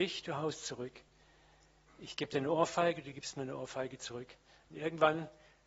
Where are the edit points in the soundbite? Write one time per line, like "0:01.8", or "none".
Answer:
none